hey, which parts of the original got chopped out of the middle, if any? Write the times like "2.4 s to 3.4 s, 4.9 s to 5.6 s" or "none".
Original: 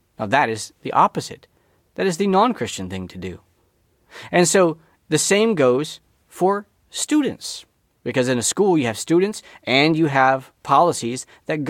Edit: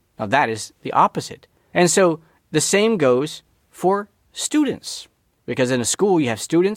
1.7 s to 4.3 s

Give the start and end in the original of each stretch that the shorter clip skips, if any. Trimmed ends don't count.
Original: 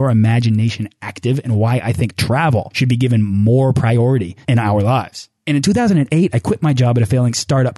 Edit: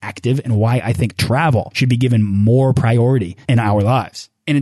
none

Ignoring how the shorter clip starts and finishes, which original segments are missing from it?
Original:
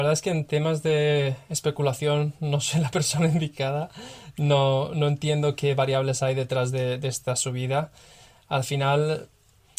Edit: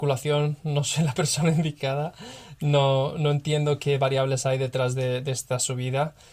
none

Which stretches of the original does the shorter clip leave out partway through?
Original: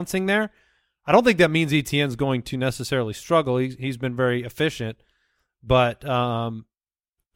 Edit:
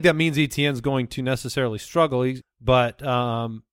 3.8 s to 5.4 s

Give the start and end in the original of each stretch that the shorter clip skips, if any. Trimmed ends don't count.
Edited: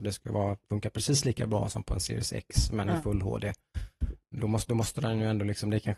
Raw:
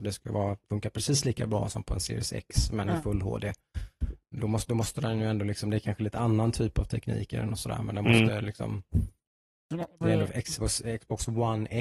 none

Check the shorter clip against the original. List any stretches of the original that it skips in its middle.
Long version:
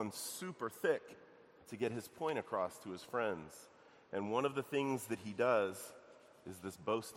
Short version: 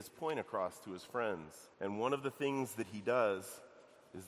3.7 s to 4.1 s

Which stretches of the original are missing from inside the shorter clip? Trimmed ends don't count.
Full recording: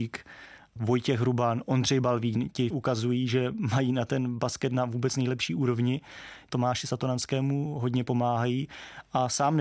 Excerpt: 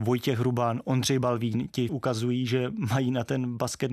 none

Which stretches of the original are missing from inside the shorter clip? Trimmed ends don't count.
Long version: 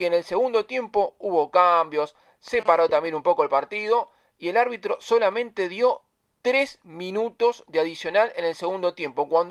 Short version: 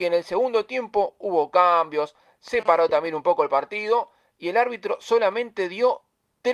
none

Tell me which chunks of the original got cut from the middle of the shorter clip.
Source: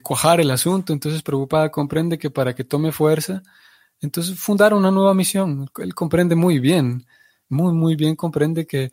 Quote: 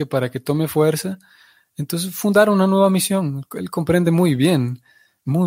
none

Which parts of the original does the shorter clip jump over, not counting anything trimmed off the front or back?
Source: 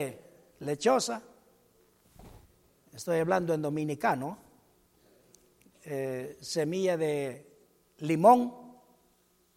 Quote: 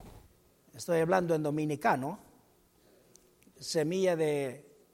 5.8 s to 6.4 s

